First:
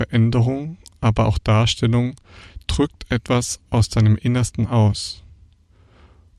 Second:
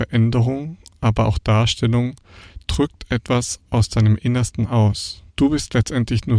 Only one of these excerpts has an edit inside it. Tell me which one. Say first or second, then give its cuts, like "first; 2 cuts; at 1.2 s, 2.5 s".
second; 1 cut; at 5.3 s